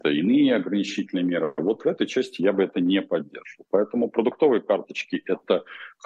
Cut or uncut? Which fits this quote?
uncut